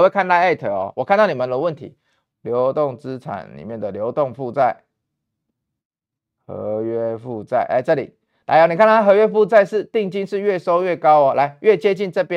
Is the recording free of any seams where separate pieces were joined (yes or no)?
no